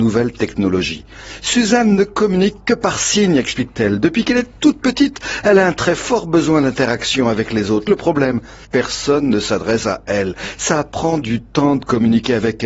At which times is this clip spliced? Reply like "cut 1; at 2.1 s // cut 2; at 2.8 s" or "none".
cut 1; at 8.7 s